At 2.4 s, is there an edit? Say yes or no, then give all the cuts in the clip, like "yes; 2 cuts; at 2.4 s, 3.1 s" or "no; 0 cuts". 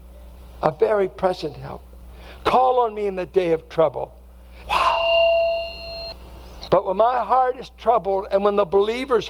no; 2 cuts; at 4.6 s, 6.7 s